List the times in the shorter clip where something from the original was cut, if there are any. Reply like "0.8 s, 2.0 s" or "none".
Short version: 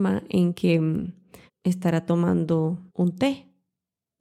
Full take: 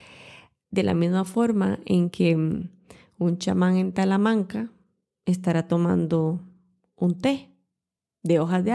1.5 s, 2.9 s